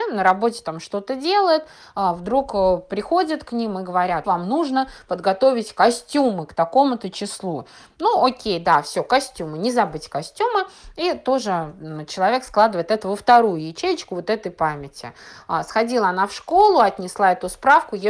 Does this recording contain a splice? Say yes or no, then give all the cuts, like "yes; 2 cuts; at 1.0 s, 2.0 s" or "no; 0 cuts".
yes; 1 cut; at 4.2 s